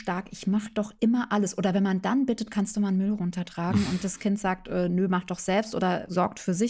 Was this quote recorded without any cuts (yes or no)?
yes